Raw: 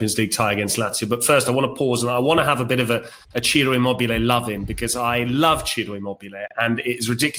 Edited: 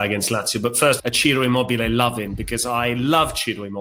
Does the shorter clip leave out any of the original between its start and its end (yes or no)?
yes